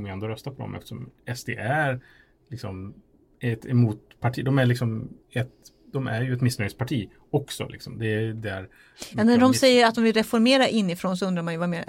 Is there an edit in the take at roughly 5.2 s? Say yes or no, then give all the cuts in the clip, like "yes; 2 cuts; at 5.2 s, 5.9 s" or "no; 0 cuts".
yes; 1 cut; at 5.2 s